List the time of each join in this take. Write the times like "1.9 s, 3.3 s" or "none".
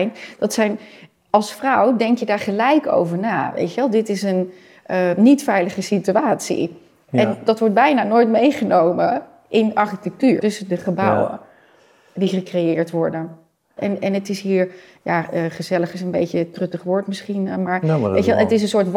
10.4 s, 13.8 s